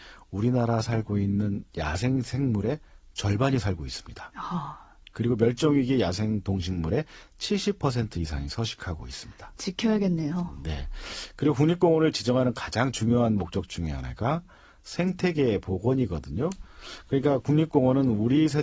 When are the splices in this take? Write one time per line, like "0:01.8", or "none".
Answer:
none